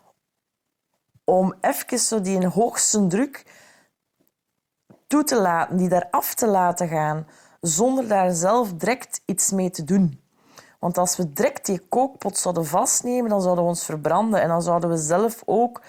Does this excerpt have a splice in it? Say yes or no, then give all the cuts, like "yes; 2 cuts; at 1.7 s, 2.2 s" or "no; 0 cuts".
no; 0 cuts